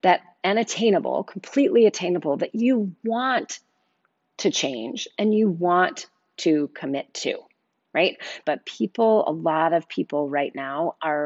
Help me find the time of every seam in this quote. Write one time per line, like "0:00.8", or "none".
0:08.4